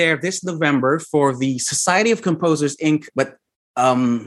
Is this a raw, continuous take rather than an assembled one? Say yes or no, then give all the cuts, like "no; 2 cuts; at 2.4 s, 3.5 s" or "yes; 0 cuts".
no; 1 cut; at 3.1 s